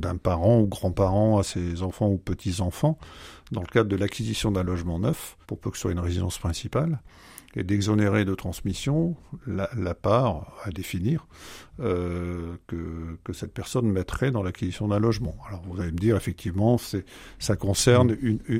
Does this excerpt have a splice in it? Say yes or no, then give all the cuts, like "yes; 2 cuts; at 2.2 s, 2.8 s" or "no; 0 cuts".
yes; 2 cuts; at 5.4 s, 12.7 s